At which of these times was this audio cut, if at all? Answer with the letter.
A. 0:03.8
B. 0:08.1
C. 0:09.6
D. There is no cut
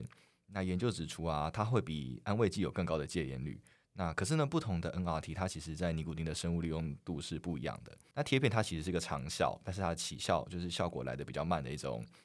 B